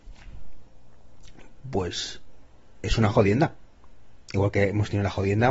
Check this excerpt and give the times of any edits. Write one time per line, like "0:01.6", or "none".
none